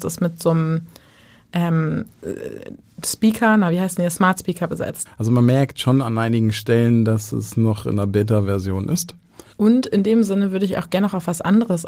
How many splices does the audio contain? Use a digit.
2